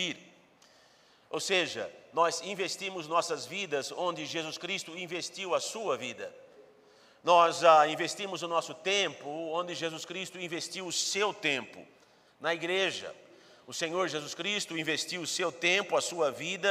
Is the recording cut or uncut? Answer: uncut